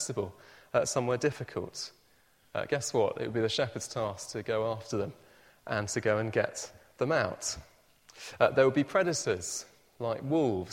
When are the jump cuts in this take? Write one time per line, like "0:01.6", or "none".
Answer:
none